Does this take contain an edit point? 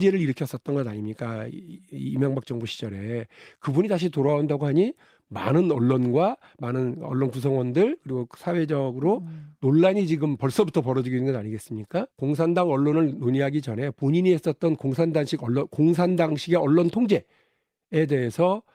yes; 1 cut; at 12.1 s

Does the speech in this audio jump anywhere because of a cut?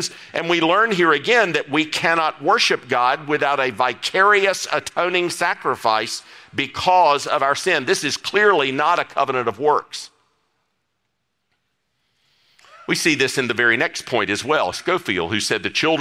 yes; 1 cut; at 14.7 s

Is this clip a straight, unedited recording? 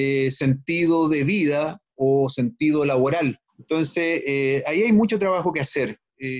no; 1 cut; at 3.5 s

